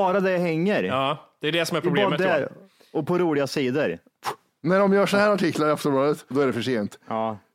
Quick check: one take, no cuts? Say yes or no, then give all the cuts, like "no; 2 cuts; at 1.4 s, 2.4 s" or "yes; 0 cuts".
no; 1 cut; at 6.3 s